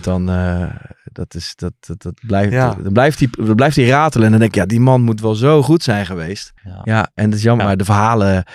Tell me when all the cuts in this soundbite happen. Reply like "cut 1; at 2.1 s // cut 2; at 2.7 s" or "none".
cut 1; at 6.6 s // cut 2; at 7.6 s